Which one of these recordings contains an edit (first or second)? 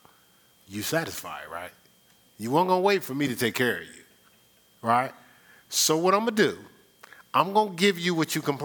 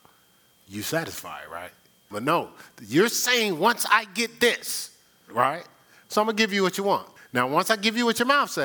second